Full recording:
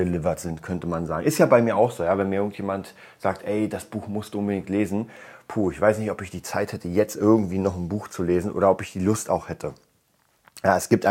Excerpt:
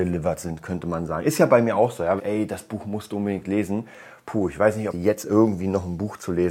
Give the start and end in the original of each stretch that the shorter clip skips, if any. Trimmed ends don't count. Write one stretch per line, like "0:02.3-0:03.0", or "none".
0:02.2-0:03.4
0:06.1-0:06.8